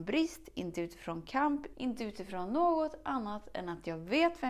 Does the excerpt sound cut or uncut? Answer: cut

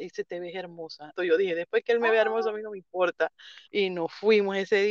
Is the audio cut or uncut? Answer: cut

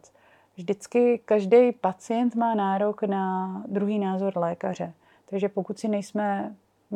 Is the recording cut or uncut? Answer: uncut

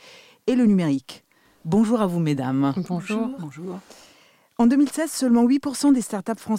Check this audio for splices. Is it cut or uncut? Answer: uncut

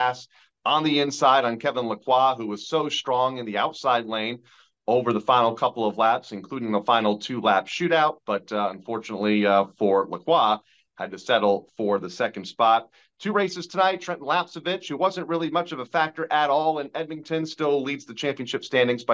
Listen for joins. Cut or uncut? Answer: uncut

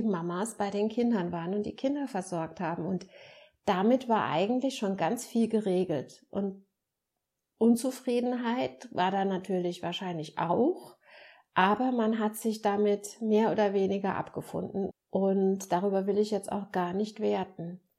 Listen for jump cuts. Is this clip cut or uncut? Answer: cut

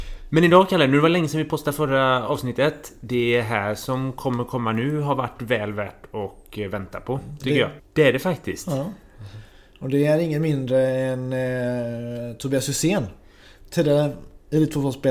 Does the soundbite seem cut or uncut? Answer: cut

